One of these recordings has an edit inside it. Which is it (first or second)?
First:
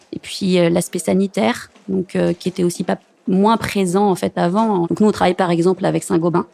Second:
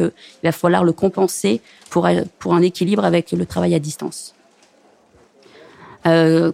first